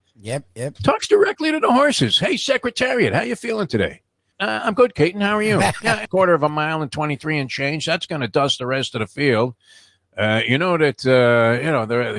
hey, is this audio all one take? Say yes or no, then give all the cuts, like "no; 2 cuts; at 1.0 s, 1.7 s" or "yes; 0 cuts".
no; 2 cuts; at 4.3 s, 6.0 s